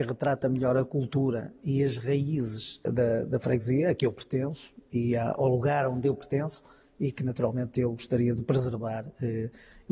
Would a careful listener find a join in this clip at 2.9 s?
yes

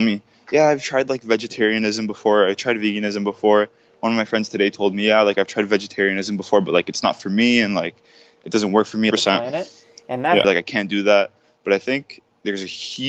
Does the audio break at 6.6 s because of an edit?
no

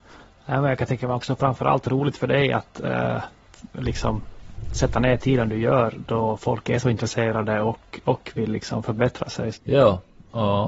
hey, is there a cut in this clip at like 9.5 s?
yes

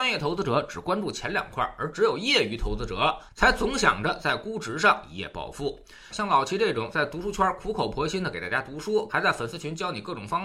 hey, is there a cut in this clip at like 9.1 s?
yes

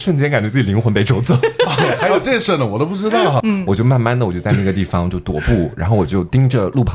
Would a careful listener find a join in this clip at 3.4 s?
yes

